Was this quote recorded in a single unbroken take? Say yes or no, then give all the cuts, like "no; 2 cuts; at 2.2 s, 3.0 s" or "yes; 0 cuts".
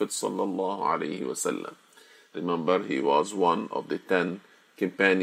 no; 1 cut; at 2.3 s